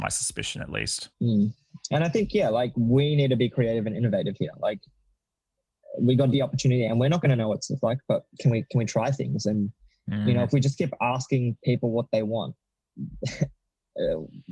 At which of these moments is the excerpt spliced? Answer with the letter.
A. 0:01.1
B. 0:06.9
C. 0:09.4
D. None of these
A